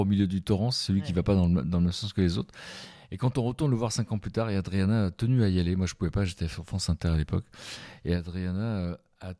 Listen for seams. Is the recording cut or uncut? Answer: uncut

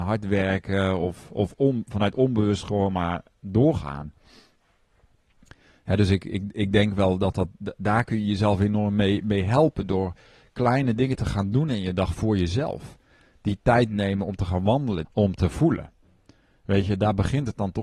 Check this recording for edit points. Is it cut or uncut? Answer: cut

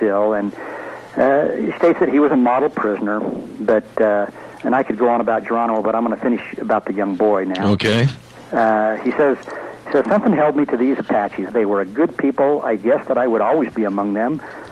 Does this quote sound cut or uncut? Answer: cut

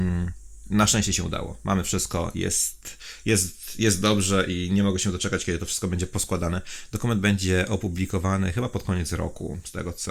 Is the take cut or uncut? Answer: uncut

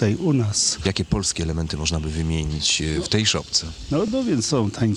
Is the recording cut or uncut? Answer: uncut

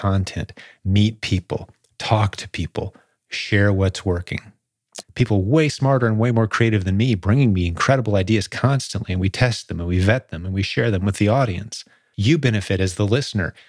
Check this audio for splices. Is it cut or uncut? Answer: cut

